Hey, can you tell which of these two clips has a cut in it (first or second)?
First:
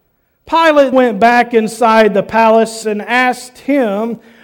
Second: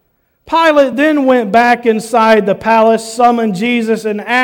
first